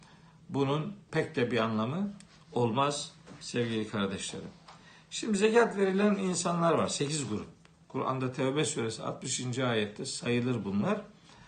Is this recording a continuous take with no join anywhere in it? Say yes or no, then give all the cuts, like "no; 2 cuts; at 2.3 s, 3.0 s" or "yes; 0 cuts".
yes; 0 cuts